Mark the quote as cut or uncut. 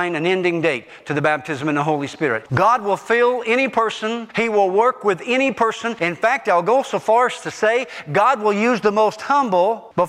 cut